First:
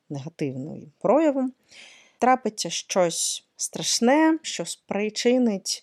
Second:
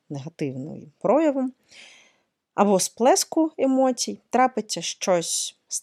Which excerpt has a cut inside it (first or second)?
first